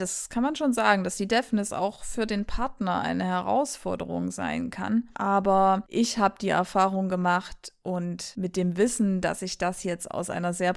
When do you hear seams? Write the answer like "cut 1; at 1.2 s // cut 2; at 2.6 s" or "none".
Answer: none